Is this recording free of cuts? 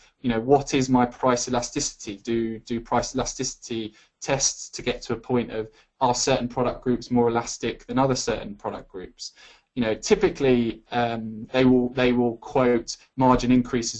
no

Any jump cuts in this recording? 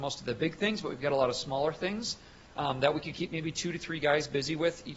no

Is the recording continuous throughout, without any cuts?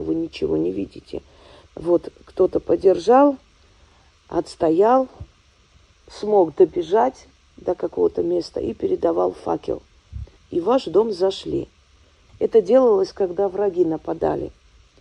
no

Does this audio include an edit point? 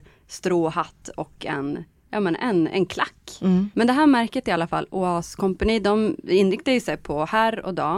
yes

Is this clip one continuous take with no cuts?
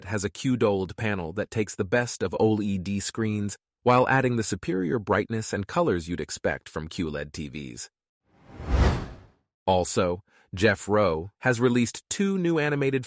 no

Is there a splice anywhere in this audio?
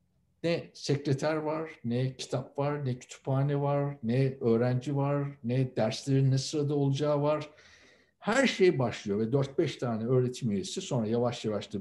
no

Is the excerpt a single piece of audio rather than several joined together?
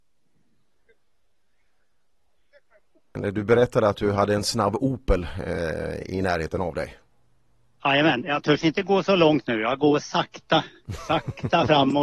yes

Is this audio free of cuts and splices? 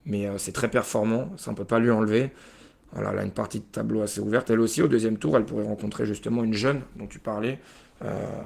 yes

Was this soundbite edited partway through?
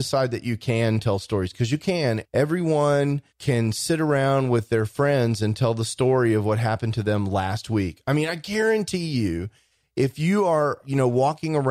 yes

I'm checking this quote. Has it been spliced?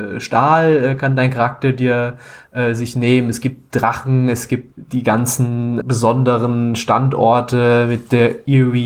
yes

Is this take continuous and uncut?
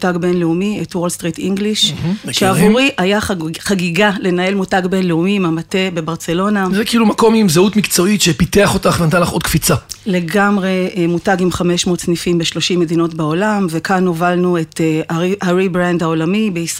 yes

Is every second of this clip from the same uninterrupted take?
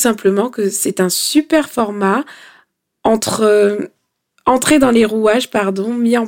yes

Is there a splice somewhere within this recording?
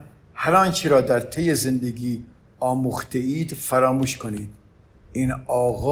no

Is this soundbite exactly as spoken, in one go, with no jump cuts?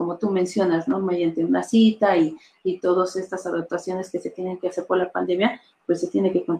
yes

